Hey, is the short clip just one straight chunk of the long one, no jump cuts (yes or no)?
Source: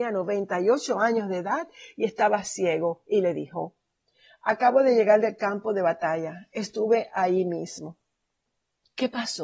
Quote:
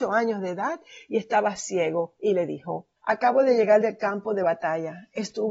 no